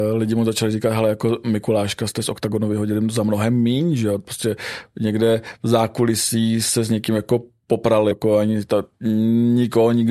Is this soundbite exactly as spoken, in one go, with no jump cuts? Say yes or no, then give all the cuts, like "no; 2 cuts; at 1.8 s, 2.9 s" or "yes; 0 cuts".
no; 1 cut; at 8.1 s